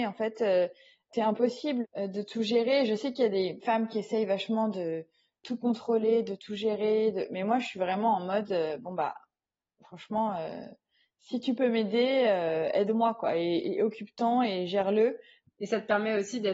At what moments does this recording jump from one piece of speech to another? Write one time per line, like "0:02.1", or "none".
none